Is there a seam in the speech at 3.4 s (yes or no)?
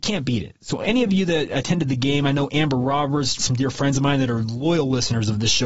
yes